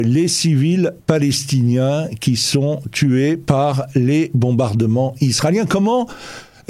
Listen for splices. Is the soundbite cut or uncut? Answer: uncut